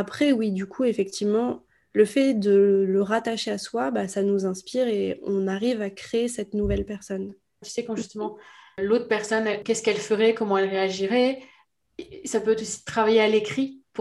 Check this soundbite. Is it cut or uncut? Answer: cut